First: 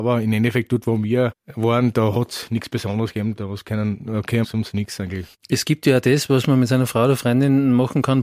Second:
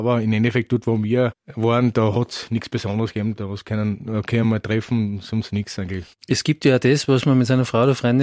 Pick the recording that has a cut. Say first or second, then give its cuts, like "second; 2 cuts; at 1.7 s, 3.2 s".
first; 1 cut; at 4.4 s